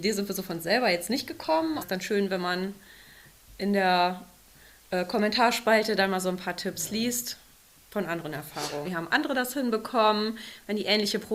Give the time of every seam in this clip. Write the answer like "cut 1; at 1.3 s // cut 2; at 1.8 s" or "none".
cut 1; at 1.8 s // cut 2; at 8.8 s